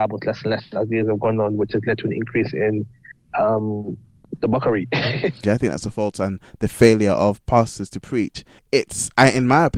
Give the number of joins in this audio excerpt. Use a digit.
2